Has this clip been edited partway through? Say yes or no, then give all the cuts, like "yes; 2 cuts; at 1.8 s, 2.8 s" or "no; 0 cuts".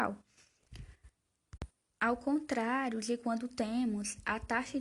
no; 0 cuts